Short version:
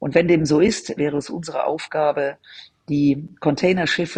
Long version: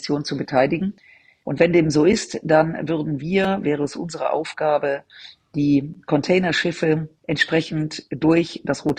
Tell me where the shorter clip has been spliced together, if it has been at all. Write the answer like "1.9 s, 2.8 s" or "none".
1.0 s